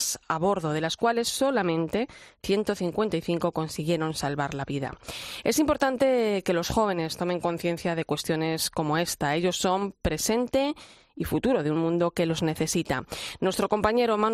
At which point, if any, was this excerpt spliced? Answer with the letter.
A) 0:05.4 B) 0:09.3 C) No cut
C